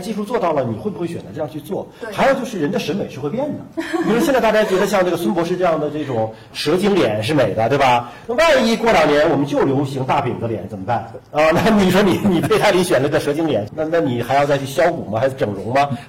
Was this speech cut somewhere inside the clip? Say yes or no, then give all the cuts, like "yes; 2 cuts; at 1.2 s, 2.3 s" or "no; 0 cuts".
yes; 1 cut; at 13.7 s